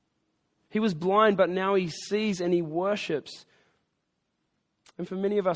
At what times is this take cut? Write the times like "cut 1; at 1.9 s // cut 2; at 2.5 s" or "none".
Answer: none